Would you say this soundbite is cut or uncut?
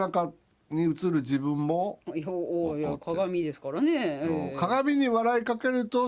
uncut